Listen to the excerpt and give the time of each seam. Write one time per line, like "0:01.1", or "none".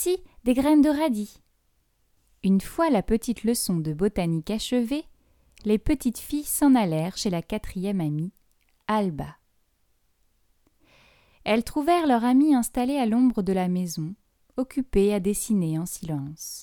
none